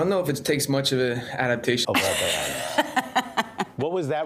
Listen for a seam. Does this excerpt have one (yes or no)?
yes